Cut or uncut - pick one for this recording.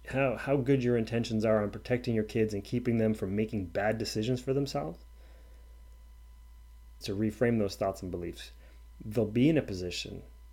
cut